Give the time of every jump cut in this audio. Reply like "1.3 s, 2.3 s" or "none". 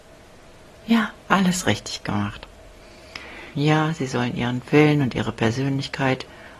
1.2 s, 3.5 s